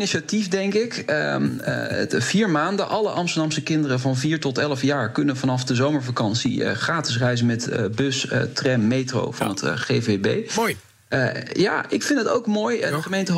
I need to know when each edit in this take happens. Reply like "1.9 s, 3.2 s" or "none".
none